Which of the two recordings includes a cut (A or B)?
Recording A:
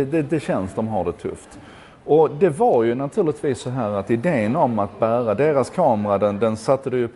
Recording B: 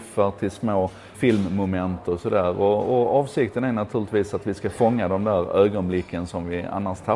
B